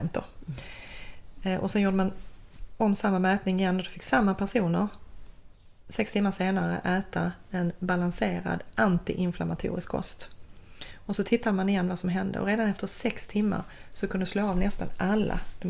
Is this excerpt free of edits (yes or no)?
yes